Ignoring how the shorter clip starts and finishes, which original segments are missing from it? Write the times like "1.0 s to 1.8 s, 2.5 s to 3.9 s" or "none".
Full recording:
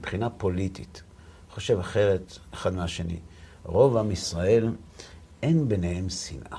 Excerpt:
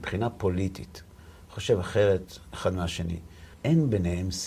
3.5 s to 5.3 s